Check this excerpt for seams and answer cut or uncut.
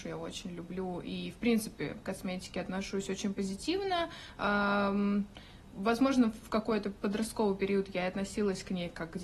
uncut